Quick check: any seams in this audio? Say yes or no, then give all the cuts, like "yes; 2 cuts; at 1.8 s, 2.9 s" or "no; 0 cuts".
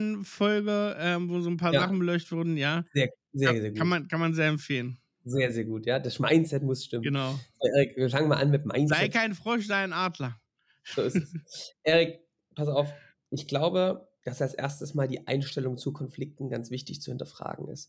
no; 0 cuts